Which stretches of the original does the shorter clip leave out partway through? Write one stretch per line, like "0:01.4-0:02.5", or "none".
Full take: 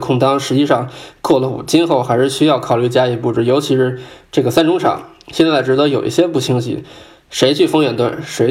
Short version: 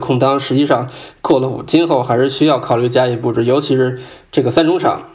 none

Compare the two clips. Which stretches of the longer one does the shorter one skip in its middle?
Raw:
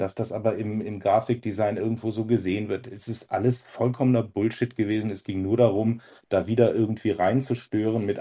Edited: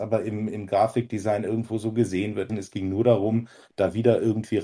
0:02.8-0:05.0

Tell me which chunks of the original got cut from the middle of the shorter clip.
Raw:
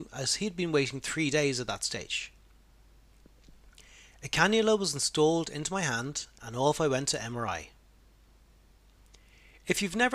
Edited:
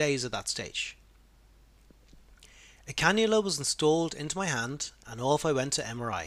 none

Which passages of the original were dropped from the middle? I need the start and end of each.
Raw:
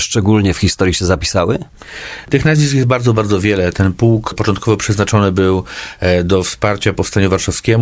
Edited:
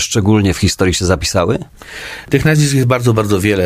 none

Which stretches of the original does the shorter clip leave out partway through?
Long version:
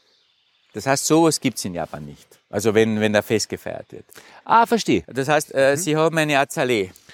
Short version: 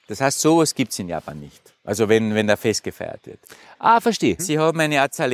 0:05.0-0:05.8

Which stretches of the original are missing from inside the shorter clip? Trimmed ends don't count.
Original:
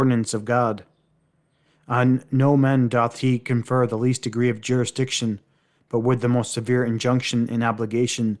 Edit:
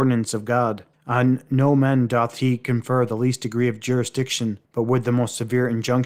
0:00.9-0:01.7
0:05.5-0:05.8

